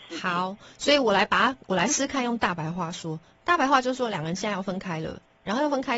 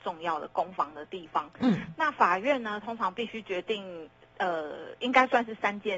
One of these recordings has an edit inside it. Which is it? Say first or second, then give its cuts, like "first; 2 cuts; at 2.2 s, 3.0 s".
first; 1 cut; at 1.9 s